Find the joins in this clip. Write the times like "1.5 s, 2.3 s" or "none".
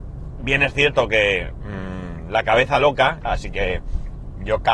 3.3 s